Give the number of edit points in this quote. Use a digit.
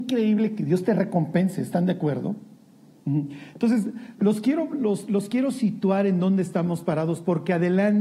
1